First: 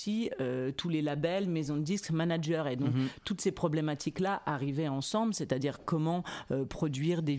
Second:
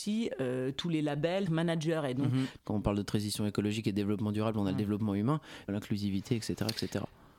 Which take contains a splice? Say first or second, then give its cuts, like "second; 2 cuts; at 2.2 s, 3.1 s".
second; 3 cuts; at 1.5 s, 2.6 s, 5.7 s